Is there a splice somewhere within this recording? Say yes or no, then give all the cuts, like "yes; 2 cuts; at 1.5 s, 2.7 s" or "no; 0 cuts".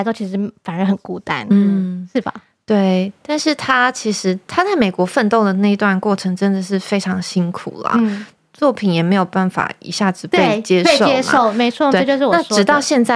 yes; 2 cuts; at 8.4 s, 11.9 s